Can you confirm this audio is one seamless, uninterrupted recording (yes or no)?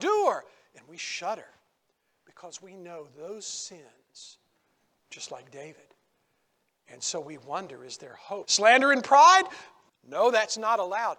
no